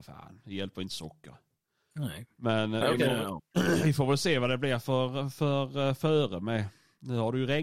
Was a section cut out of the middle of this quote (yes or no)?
no